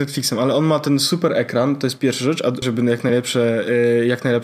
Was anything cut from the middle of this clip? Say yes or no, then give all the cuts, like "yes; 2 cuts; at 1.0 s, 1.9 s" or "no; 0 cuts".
yes; 1 cut; at 2.6 s